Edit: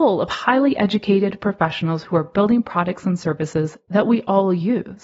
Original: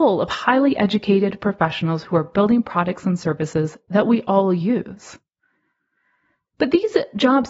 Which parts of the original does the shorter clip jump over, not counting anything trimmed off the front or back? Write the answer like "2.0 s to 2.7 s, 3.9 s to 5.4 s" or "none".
none

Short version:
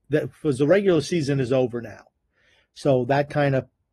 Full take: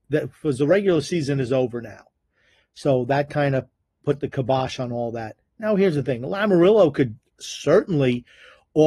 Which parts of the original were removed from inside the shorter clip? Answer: none

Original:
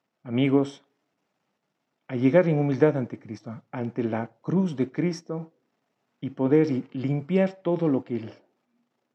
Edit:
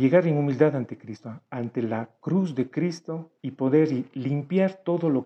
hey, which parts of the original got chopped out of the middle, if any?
5.6 s to 6.2 s

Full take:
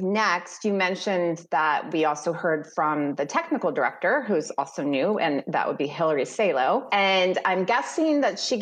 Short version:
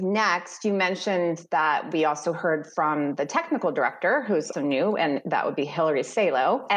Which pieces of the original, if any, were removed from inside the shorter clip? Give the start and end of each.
4.5 s to 4.7 s

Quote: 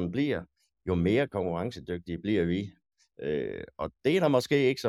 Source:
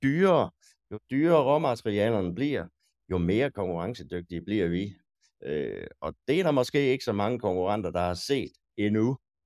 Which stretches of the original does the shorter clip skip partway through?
none

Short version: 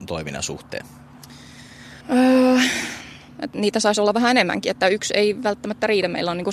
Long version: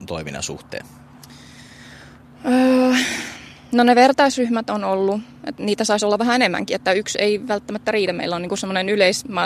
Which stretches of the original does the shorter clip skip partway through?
2.0 s to 2.4 s, 3.6 s to 5.3 s

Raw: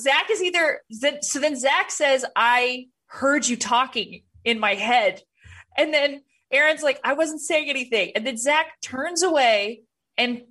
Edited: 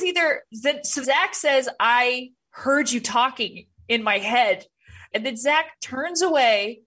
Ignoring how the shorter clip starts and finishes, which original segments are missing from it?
1.4 s to 1.6 s, 5.7 s to 8.1 s

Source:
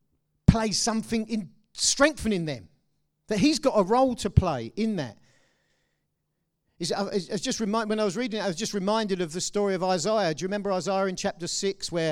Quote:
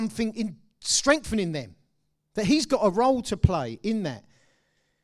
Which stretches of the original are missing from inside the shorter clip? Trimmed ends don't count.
none

